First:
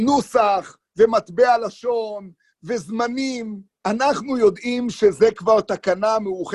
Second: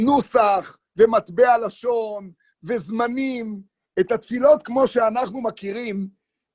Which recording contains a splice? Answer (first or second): first